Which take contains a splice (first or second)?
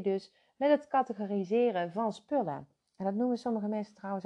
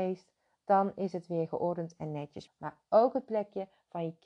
second